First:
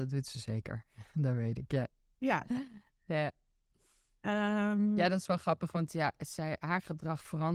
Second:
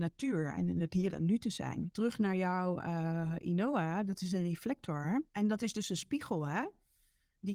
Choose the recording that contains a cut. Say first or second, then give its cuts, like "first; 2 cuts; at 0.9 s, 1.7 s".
second; 1 cut; at 5.3 s